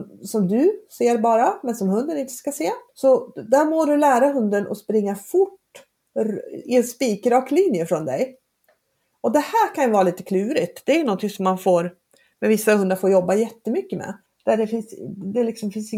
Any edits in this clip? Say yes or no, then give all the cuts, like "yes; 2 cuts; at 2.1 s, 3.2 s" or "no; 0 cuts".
yes; 2 cuts; at 2.9 s, 14.3 s